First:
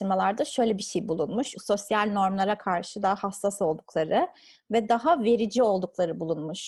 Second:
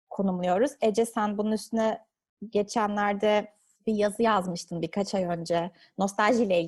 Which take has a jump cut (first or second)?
first